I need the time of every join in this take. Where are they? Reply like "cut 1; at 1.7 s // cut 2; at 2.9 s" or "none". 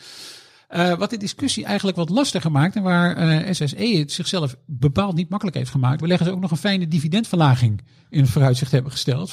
cut 1; at 6.0 s